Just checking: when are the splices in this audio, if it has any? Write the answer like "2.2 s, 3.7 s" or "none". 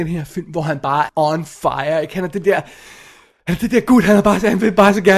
1.1 s